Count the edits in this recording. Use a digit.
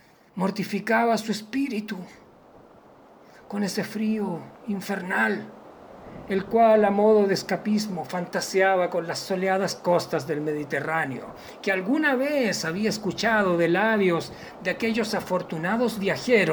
0